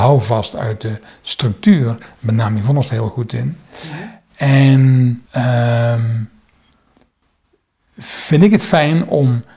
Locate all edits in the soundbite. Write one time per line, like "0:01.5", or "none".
0:05.3